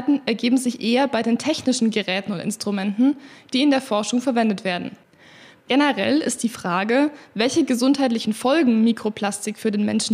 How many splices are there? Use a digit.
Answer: 1